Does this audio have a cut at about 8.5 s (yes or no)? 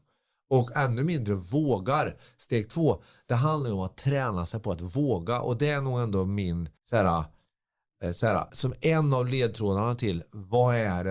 yes